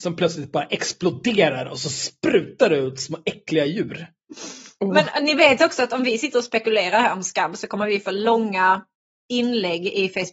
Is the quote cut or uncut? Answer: uncut